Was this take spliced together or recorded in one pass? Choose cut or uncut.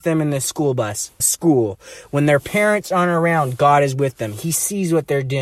cut